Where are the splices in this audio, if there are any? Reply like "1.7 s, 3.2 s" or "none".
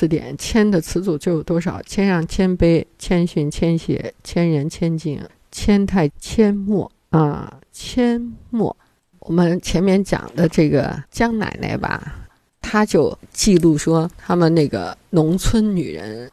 6.1 s